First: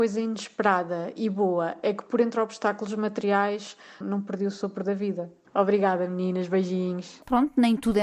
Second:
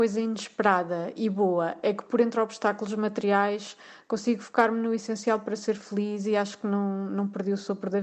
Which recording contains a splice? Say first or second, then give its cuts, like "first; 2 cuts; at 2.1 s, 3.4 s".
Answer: first; 2 cuts; at 4.0 s, 5.4 s